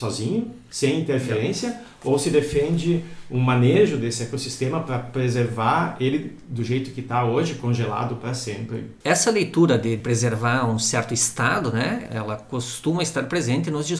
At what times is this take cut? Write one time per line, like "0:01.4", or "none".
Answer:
0:09.0